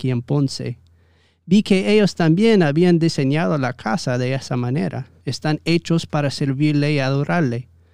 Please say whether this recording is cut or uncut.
cut